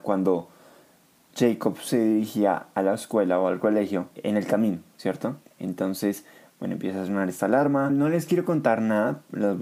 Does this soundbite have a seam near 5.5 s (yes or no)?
yes